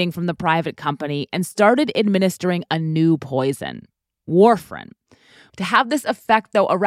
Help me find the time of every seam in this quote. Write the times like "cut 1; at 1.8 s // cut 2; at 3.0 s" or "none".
cut 1; at 5.5 s